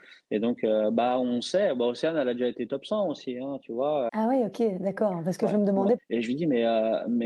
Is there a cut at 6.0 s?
yes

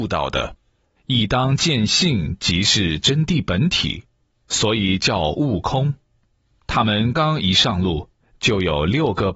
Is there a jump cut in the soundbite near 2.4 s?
no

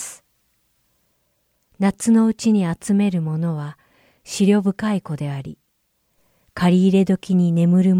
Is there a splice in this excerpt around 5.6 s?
no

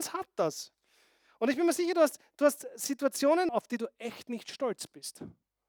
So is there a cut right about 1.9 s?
no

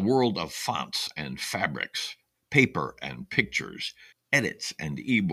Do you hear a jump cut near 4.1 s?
yes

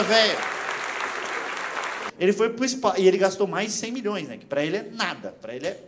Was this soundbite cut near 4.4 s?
no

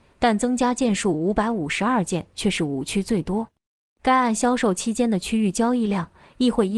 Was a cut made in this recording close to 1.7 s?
no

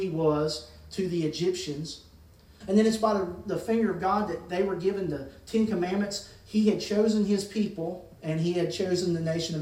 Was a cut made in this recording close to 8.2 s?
yes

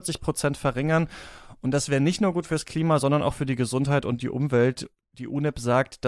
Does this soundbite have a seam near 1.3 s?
no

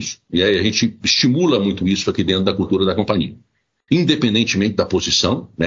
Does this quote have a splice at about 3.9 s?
yes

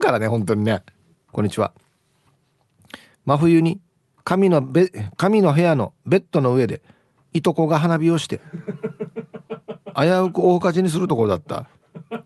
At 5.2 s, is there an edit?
no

